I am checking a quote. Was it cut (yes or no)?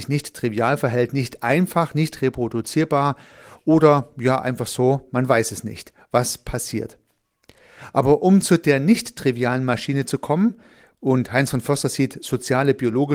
no